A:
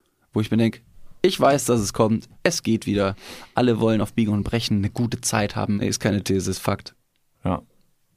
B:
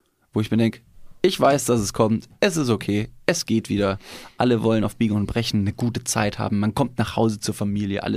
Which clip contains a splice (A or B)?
A